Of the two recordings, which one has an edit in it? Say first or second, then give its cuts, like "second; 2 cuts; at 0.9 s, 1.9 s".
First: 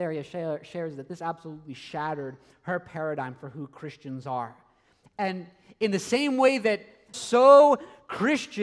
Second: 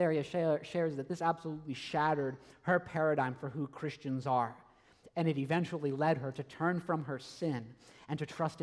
first; 2 cuts; at 5.1 s, 7.1 s